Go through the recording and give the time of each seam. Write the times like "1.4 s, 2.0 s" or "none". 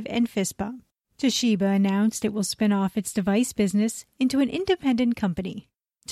1.0 s, 4.1 s